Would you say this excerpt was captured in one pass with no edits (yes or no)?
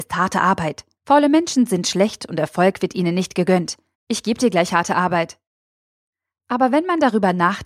no